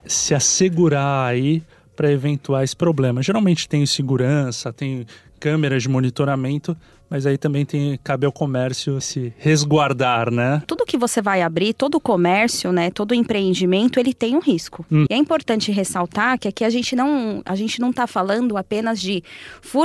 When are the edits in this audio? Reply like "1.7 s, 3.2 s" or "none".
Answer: 10.6 s, 15.1 s